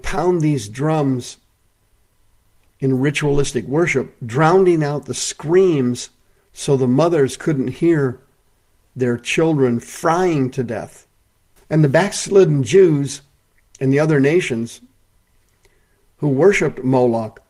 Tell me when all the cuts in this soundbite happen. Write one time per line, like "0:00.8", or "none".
0:11.6